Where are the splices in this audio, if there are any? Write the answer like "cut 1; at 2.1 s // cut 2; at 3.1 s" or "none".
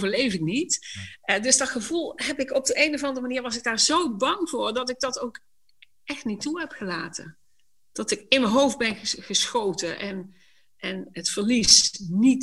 none